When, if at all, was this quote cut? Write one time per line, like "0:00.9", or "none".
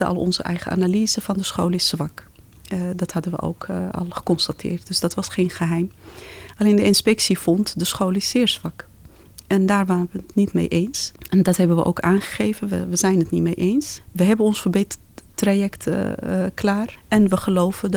0:14.0
0:17.0